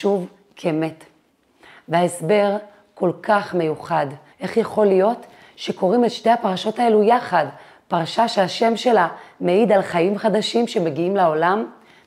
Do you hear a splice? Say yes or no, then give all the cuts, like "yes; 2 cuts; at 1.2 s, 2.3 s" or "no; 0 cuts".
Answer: yes; 1 cut; at 4.3 s